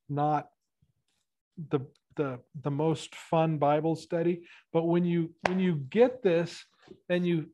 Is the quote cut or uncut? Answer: uncut